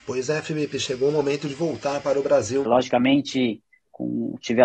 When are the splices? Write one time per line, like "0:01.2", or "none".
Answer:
0:02.6